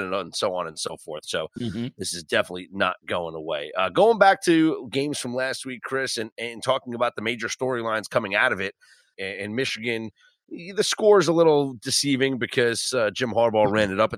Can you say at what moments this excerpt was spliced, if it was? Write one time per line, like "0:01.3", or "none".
0:09.1